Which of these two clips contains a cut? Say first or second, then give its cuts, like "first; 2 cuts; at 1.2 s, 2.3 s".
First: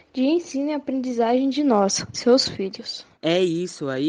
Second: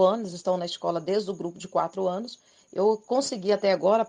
first; 1 cut; at 3.1 s